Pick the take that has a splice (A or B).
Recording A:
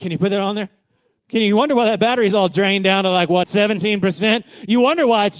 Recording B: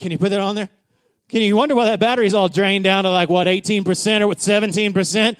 A